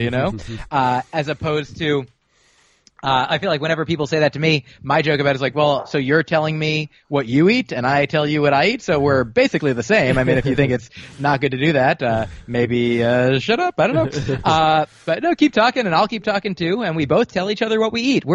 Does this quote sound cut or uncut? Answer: uncut